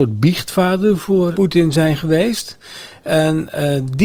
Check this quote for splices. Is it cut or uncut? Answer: cut